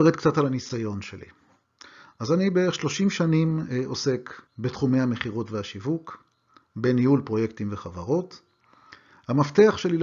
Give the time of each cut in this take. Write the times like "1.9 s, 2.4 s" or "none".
4.5 s